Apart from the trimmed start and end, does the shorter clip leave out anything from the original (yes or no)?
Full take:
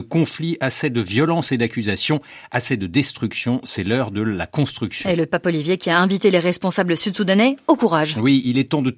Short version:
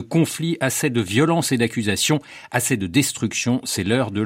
no